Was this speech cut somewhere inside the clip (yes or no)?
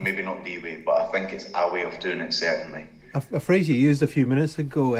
no